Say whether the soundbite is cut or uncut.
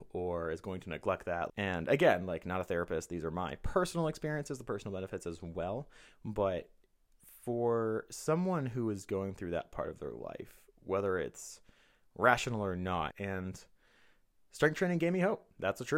cut